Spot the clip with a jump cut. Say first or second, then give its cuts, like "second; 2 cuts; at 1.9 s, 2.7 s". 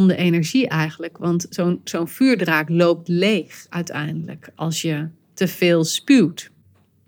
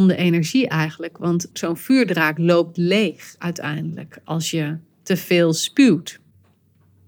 second; 1 cut; at 1.5 s